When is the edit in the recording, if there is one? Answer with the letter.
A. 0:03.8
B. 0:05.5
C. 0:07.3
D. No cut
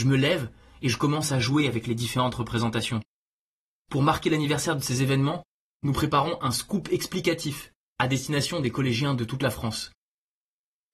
D